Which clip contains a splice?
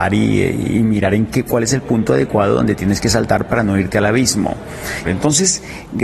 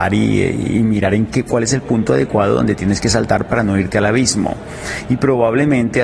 first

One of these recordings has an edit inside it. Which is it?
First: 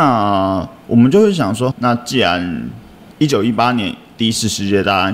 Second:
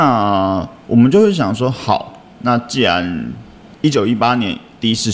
first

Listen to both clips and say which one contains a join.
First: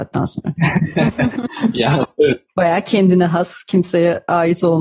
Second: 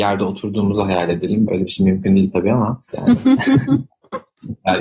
second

